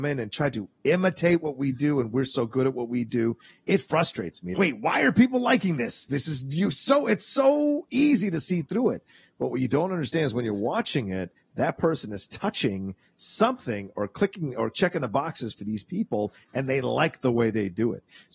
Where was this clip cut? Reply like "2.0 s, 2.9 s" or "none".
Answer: 4.5 s